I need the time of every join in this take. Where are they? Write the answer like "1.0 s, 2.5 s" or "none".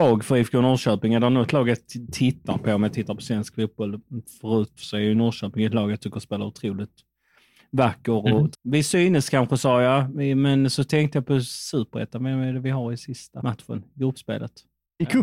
4.8 s, 8.5 s